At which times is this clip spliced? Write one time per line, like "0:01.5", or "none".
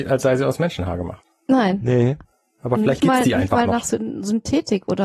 none

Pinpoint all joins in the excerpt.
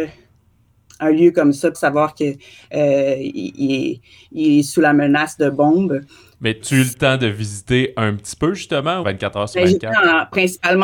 0:01.7
0:06.6
0:09.0

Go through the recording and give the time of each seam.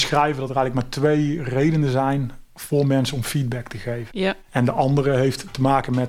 0:04.1

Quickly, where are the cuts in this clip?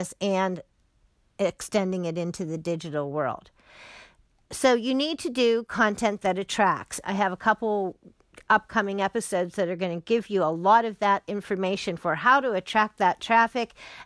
0:07.0

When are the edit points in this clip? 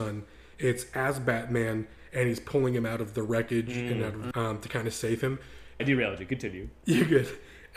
0:04.3
0:05.8

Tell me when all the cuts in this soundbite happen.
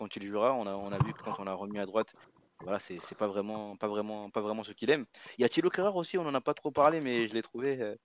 none

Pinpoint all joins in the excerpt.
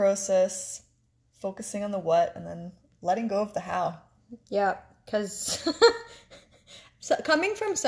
none

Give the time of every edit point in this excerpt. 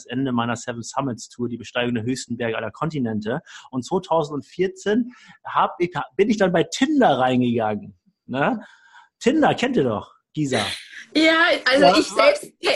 none

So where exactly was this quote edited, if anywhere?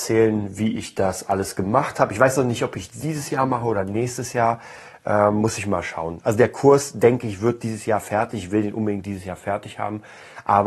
none

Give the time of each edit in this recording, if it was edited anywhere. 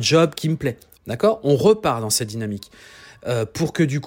0:01.0

